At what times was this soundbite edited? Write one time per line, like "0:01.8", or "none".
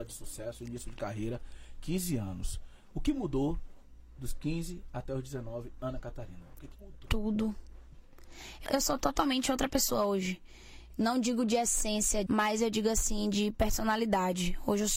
0:08.7
0:12.3